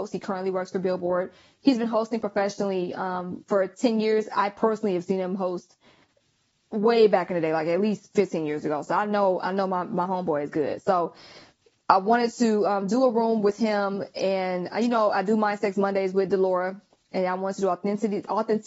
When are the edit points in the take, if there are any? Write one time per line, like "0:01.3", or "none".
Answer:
none